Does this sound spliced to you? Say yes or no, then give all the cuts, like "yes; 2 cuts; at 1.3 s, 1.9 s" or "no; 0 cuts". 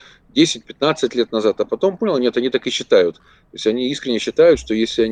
no; 0 cuts